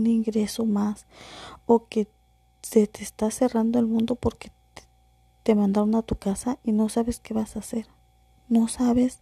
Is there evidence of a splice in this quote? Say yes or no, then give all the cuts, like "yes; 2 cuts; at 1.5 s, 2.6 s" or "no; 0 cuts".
no; 0 cuts